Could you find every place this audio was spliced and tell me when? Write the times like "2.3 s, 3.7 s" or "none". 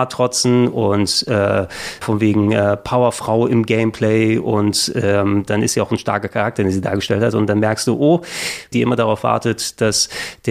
2.0 s, 5.5 s, 8.7 s

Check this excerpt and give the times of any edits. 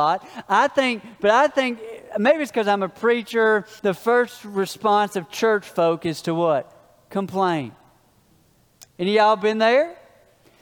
3.8 s

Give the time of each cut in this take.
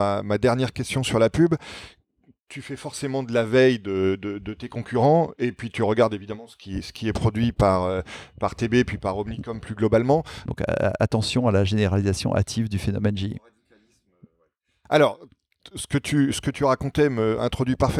10.5 s

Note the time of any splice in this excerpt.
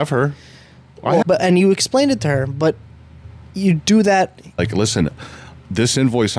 1.2 s, 4.6 s

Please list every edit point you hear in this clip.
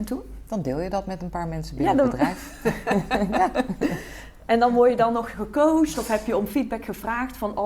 none

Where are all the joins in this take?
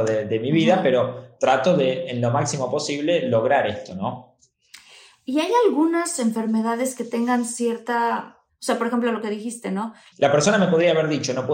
8.5 s, 10.1 s

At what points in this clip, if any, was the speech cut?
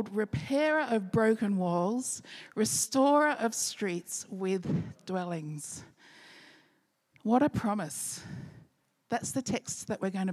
none

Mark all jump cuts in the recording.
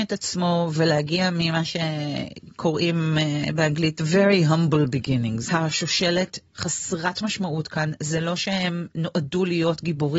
5.5 s

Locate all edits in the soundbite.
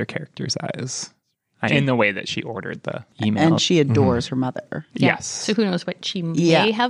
1.7 s

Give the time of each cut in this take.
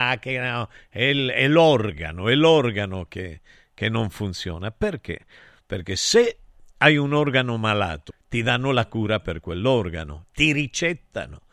5.6 s, 8.1 s

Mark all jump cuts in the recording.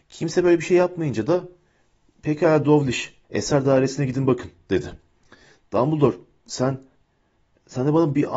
3.2 s

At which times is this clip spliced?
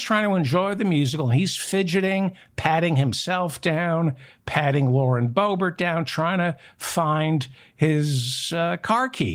none

